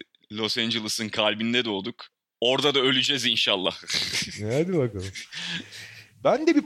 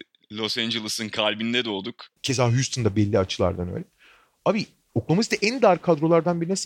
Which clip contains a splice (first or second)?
second